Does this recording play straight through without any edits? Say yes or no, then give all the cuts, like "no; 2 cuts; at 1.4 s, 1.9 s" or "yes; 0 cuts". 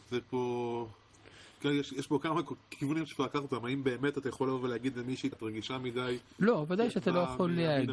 no; 1 cut; at 5.3 s